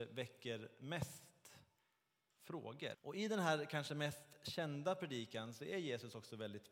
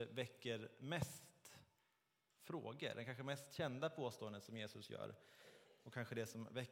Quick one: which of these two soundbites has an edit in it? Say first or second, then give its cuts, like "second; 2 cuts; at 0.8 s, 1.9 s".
first; 1 cut; at 2.9 s